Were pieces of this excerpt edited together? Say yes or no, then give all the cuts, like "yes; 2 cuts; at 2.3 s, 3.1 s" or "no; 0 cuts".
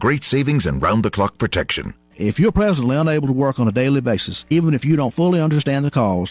yes; 1 cut; at 2.1 s